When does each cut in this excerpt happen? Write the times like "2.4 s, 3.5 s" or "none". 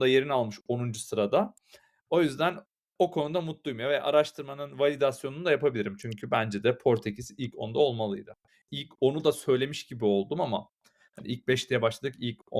none